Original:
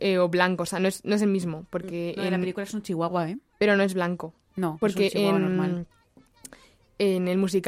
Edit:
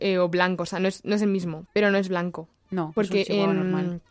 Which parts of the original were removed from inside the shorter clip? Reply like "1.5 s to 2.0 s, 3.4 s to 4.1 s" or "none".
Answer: 1.7 s to 3.5 s

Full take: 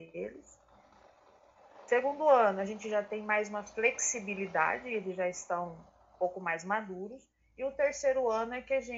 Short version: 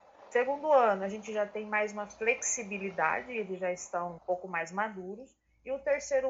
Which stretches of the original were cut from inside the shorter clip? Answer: 5.7 s to 6.1 s

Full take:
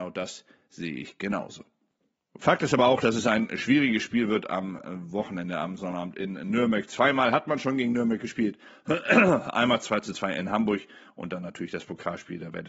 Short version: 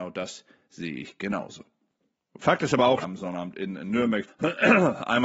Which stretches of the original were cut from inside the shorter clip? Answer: 3.0 s to 5.6 s, 6.9 s to 8.7 s

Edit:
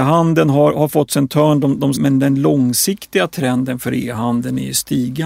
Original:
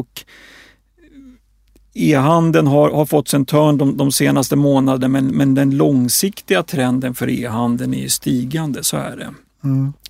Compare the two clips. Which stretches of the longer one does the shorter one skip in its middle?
4.1 s to 5.3 s

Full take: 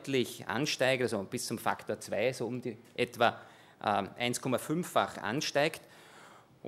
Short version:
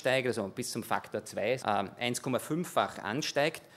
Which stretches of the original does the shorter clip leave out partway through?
2.3 s to 3.8 s

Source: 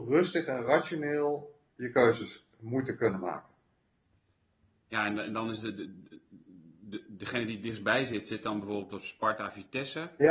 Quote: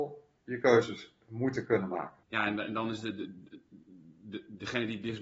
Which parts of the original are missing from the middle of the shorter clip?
3.5 s to 4.8 s

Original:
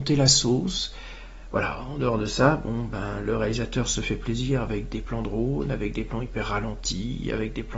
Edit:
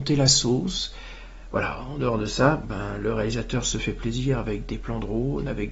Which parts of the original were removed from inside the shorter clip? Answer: 2.6 s to 2.9 s

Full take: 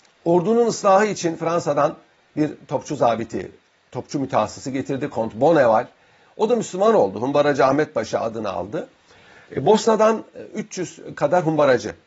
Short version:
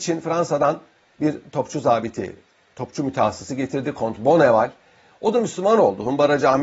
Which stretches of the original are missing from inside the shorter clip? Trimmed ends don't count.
none

